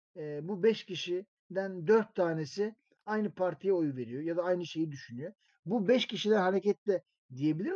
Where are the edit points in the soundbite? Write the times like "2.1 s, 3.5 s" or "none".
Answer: 5.5 s